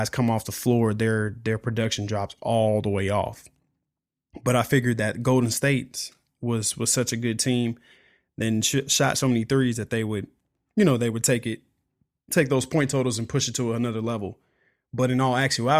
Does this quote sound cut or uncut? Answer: uncut